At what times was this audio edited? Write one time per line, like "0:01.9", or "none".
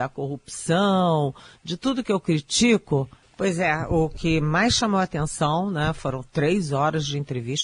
0:03.2